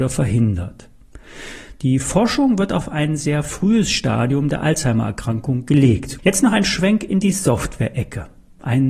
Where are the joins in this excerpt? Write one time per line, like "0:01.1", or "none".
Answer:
0:06.2